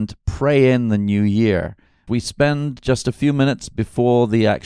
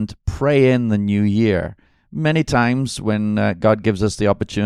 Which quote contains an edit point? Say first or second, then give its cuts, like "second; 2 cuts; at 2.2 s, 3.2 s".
first; 1 cut; at 2.1 s